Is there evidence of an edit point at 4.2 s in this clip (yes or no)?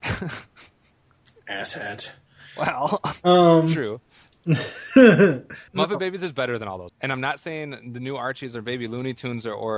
no